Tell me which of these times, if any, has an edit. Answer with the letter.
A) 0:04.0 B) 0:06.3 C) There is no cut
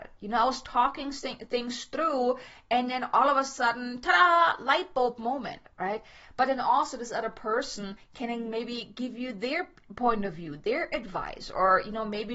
C